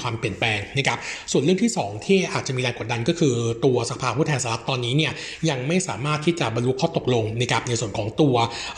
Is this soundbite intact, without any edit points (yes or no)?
yes